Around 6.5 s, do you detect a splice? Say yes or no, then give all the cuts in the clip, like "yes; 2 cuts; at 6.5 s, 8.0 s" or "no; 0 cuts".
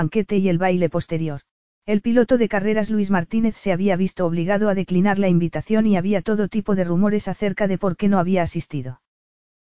no; 1 cut; at 1.7 s